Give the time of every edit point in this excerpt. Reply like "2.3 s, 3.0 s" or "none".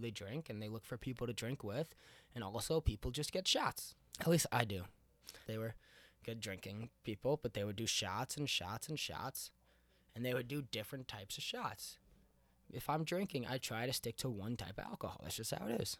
4.1 s, 5.4 s